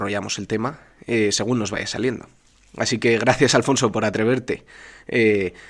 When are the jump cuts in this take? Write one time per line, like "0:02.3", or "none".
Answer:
none